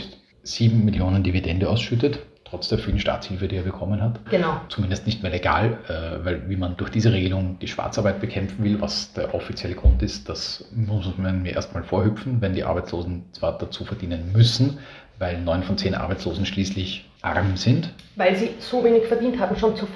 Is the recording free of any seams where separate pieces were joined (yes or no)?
no